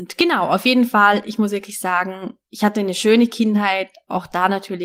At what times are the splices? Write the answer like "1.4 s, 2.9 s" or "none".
2.4 s